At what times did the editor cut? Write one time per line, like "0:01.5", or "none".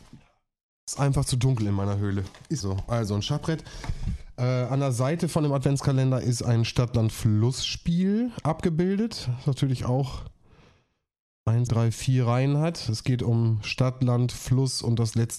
0:02.6
0:11.7